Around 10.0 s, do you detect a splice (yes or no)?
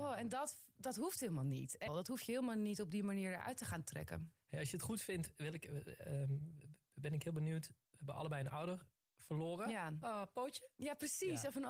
yes